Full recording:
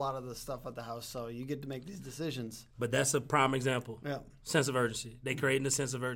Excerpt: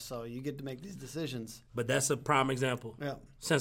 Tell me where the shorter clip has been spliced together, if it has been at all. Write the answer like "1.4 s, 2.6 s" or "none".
none